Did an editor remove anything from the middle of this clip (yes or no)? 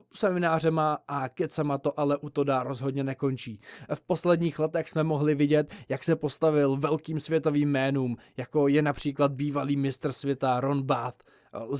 no